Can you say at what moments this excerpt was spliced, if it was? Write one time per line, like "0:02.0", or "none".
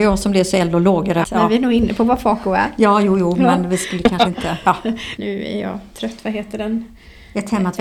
0:01.2
0:05.2